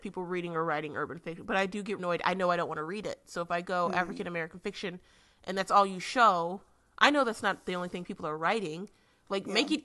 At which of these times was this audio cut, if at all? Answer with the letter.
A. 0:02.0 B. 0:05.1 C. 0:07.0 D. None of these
A